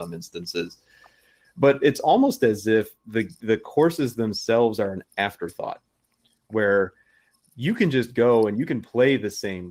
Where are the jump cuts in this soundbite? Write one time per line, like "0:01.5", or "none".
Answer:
none